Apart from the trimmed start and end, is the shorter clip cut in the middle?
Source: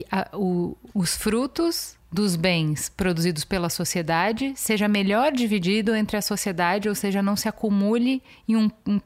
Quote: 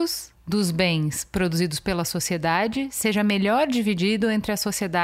no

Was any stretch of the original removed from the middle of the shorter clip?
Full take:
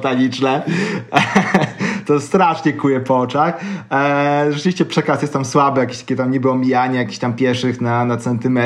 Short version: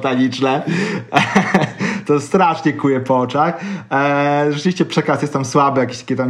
no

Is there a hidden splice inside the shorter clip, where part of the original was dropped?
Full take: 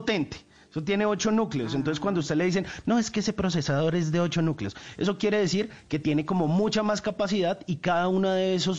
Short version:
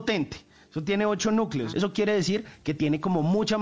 yes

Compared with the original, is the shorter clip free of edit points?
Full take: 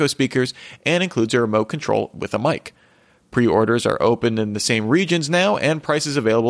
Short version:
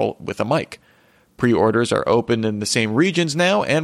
yes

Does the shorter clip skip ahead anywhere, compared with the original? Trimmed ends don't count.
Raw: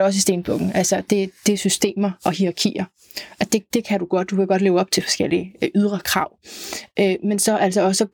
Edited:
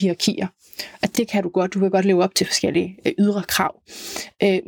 yes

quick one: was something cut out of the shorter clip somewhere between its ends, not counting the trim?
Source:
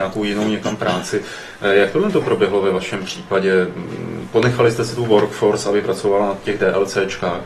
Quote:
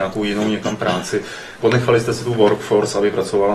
yes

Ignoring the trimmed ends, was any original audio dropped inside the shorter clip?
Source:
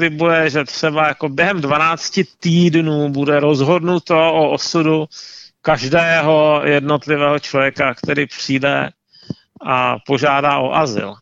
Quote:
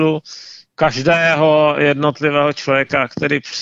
no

